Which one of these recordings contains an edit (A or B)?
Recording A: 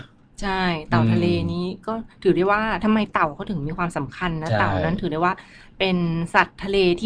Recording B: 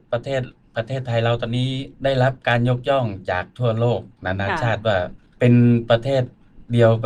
B